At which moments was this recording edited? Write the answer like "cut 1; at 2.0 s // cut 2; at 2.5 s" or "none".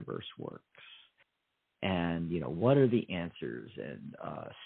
none